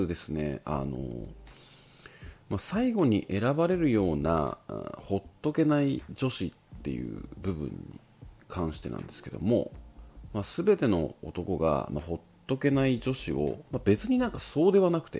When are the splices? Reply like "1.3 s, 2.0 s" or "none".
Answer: 13.7 s